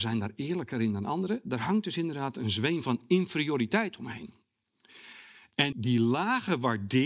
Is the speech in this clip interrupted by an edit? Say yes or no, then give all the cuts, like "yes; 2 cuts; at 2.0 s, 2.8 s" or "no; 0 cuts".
yes; 1 cut; at 5.7 s